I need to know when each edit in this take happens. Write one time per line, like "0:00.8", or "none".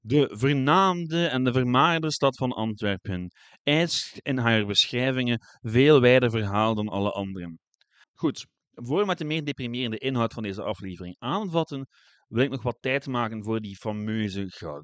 0:08.0